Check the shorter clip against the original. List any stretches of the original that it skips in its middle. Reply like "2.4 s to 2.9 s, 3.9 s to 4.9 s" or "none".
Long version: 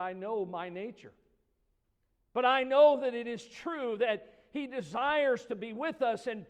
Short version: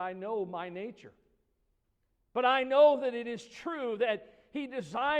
none

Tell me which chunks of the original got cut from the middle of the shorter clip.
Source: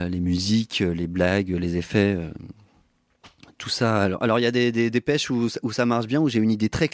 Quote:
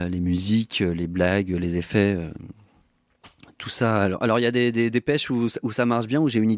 none

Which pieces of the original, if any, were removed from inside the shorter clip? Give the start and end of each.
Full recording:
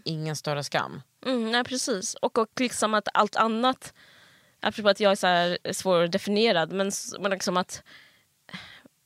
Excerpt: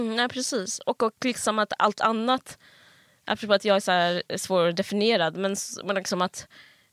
none

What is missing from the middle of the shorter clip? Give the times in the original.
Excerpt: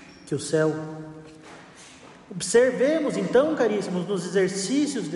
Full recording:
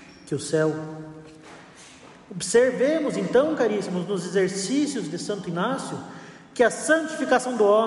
none

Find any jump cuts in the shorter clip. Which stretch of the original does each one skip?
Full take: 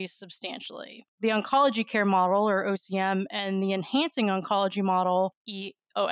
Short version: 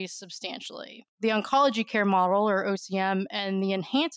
none

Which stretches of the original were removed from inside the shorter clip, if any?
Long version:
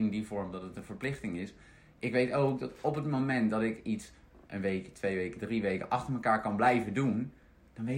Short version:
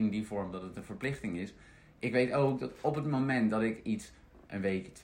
none

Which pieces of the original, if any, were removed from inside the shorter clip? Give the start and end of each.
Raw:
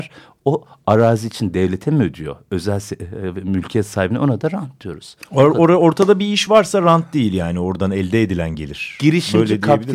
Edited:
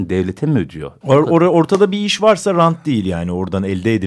2.5 s to 5.3 s

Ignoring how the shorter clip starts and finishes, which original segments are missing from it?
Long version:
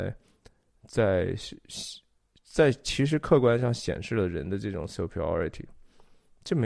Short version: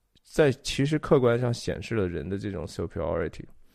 none

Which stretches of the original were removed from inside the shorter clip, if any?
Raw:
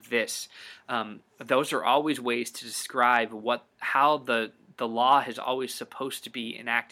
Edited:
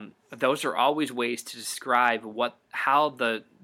none

